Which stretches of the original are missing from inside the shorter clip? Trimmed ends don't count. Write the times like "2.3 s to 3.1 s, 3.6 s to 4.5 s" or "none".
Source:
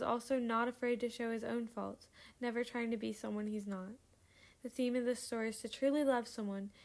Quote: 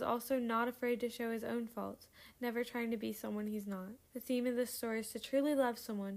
4.0 s to 4.5 s